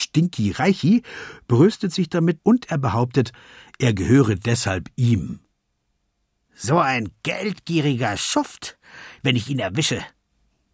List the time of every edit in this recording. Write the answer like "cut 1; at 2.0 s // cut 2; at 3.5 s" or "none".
cut 1; at 2.4 s // cut 2; at 9.2 s